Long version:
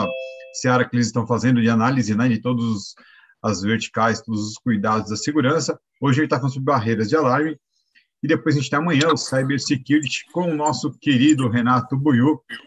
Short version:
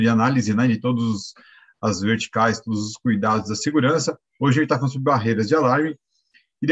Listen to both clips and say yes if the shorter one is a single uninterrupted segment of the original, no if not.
yes